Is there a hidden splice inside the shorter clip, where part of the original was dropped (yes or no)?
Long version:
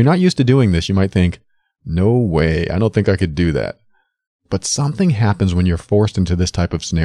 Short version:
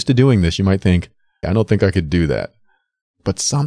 yes